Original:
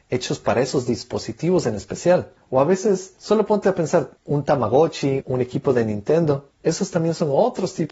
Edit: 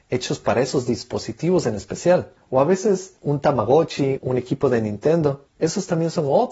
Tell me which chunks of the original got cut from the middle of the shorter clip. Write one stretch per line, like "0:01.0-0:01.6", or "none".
0:03.2-0:04.2